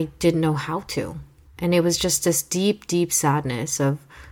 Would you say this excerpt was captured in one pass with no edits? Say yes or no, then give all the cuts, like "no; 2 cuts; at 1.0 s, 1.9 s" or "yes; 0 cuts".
no; 1 cut; at 1.5 s